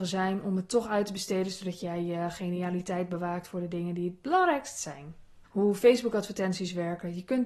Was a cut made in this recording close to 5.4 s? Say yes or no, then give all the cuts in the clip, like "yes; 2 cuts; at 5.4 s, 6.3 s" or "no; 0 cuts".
yes; 1 cut; at 5.4 s